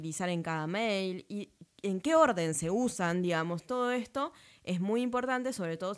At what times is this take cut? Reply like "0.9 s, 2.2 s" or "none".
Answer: none